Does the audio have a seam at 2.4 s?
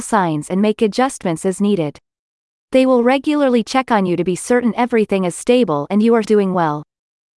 no; 1 cut; at 6.2 s

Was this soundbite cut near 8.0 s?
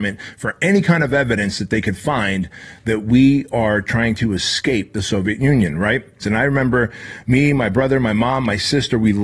no; 1 cut; at 6.2 s

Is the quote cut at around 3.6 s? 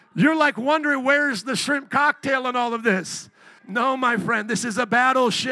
yes; 1 cut; at 3.6 s

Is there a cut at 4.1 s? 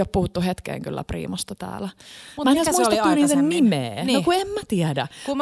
no; 0 cuts

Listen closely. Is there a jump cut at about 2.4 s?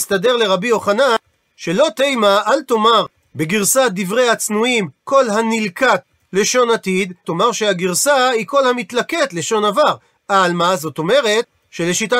no; 1 cut; at 7.2 s

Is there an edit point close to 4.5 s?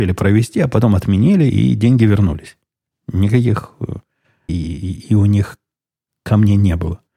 yes; 1 cut; at 4.5 s

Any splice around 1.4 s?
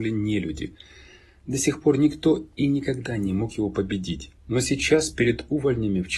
no; 1 cut; at 4.4 s

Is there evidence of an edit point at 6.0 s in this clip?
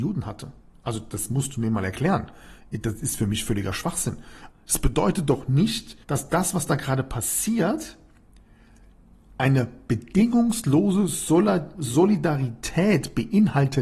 yes; 2 cuts; at 4.5 s, 6.0 s

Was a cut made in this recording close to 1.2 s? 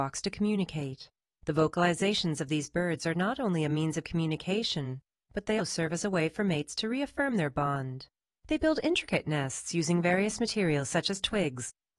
no; 2 cuts; at 5.6 s, 8.4 s

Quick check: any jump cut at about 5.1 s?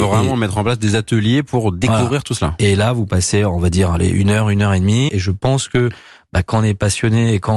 yes; 1 cut; at 5.1 s

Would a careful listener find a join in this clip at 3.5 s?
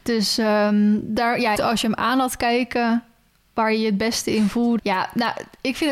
no; 2 cuts; at 1.5 s, 4.8 s

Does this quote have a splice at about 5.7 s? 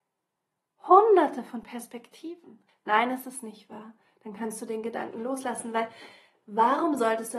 no; 1 cut; at 2.7 s

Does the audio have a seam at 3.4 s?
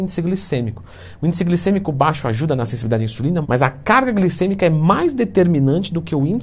yes; 1 cut; at 3.4 s

